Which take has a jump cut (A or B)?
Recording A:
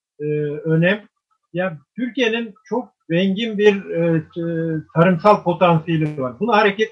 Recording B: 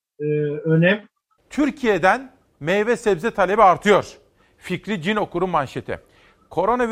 B